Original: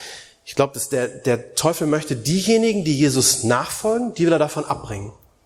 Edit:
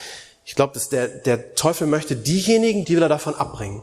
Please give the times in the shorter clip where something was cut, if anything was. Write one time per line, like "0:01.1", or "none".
0:02.8